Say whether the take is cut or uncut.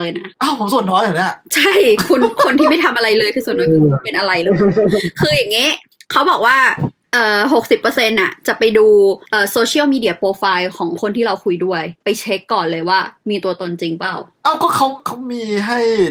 uncut